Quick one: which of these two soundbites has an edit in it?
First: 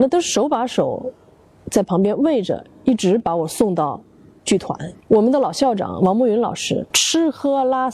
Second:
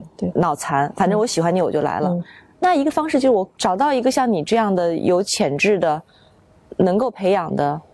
first; 1 cut; at 6.9 s

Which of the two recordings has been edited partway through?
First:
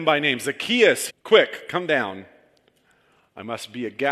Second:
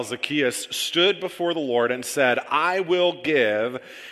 first; 1 cut; at 1.1 s

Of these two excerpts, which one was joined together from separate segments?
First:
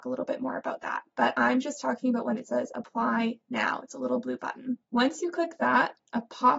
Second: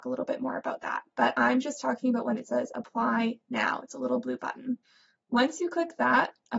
first; 1 cut; at 4.8 s

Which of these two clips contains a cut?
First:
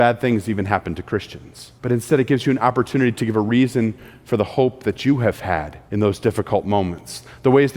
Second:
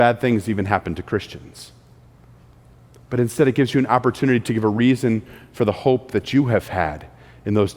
first; 2 cuts; at 1.8 s, 5.8 s

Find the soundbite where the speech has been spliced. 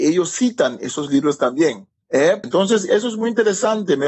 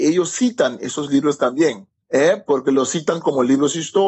first; 1 cut; at 2.4 s

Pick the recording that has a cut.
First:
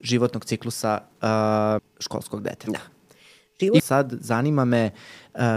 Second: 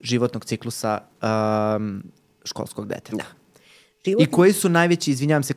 first; 2 cuts; at 1.8 s, 3.8 s

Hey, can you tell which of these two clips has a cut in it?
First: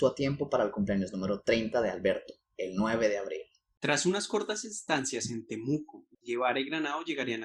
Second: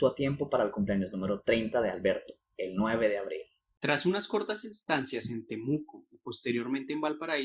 first; 1 cut; at 6.1 s

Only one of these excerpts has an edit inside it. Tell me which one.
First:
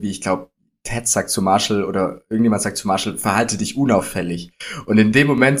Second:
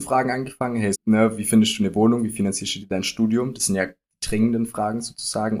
second; 1 cut; at 0.9 s

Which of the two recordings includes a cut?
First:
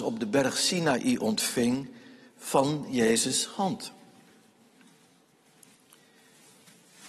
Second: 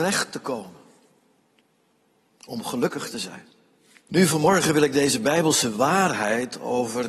second; 1 cut; at 4.0 s

